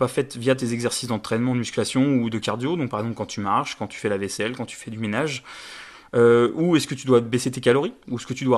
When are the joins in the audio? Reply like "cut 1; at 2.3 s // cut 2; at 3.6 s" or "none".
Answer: none